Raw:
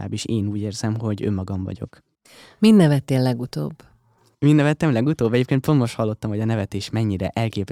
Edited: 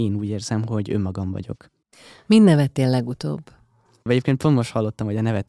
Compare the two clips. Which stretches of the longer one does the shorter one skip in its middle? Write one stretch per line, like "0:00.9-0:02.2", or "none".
0:04.4-0:05.3

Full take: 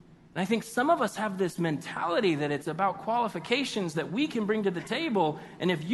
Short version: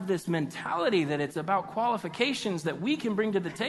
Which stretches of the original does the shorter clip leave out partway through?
none

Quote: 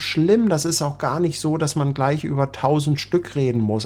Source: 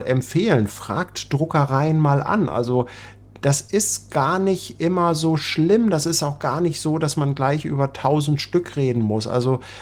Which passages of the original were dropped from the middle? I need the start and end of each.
none

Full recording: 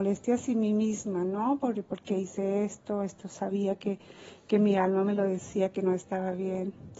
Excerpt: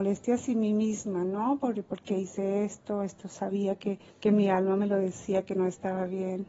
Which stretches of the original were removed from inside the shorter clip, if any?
0:04.1-0:04.4

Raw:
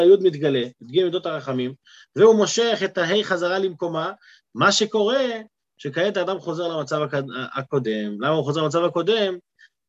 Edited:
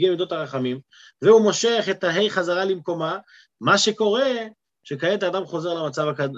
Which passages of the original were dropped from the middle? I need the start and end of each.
none

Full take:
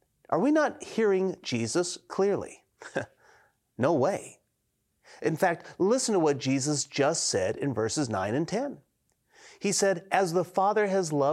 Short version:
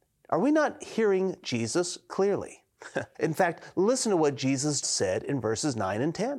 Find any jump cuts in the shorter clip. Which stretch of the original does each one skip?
0:03.1-0:05.2
0:06.9-0:07.2

